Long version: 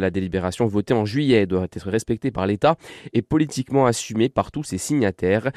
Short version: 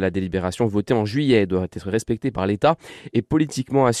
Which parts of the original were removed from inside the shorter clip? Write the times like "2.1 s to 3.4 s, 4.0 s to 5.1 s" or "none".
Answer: none